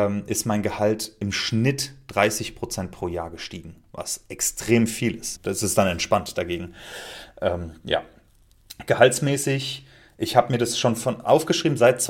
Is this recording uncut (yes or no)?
no